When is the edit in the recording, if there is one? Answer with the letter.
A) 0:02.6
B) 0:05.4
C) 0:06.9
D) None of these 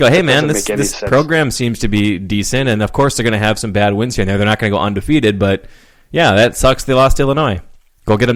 D